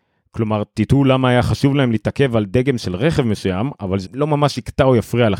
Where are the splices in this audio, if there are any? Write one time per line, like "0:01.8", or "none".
0:04.0